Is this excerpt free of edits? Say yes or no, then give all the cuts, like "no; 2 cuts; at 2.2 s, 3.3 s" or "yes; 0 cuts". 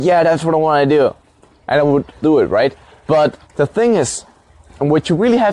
no; 2 cuts; at 2.2 s, 3.4 s